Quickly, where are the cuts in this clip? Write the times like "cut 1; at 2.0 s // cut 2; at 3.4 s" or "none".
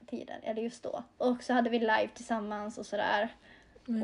cut 1; at 1.2 s